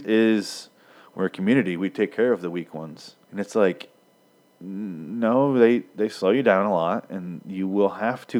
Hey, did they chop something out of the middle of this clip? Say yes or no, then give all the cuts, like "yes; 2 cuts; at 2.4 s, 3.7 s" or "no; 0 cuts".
yes; 1 cut; at 3.2 s